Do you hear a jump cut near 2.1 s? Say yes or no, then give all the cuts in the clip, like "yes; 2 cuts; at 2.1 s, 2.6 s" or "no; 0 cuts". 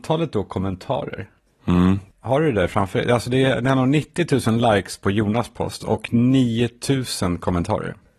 no; 0 cuts